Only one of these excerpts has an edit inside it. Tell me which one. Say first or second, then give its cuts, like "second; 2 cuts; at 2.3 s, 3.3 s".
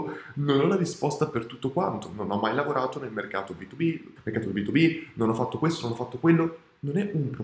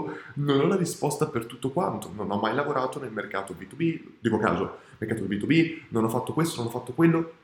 first; 1 cut; at 4.2 s